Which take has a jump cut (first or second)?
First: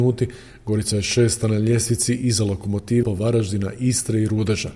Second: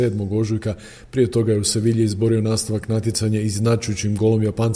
first